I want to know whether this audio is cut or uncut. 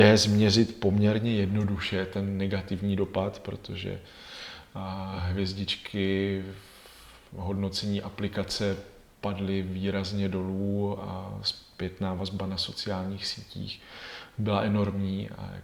uncut